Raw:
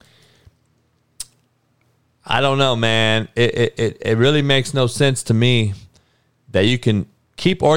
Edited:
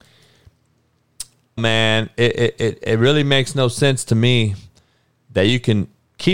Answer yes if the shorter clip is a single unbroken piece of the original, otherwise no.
no